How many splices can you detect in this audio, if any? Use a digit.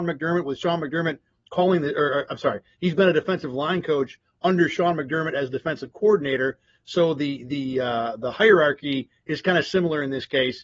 0